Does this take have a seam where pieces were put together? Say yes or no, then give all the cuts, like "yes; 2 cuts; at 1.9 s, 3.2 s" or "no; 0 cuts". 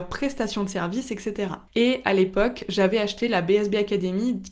yes; 1 cut; at 1.7 s